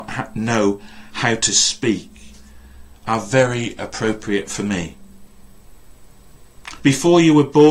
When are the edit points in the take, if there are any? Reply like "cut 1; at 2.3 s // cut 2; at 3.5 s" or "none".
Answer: cut 1; at 6.8 s